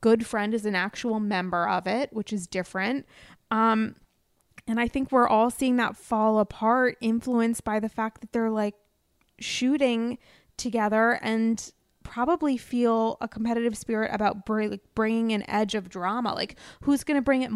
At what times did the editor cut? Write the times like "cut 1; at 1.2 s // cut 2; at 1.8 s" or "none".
none